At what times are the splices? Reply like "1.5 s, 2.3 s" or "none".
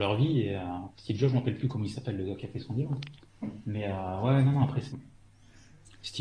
0.9 s, 4.9 s